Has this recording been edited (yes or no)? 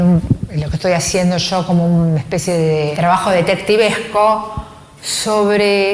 yes